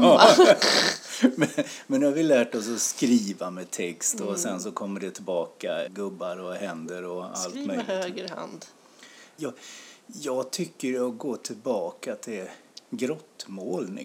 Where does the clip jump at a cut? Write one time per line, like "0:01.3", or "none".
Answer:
0:05.9
0:09.4